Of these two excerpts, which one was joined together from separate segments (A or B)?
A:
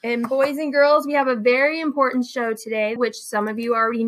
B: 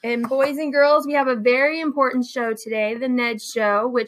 A